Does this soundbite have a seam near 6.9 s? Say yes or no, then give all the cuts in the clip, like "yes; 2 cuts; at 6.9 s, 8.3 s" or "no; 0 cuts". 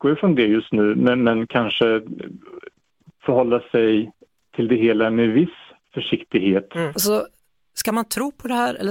yes; 1 cut; at 6.9 s